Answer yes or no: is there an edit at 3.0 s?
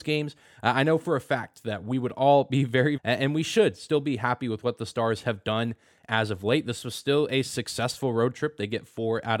yes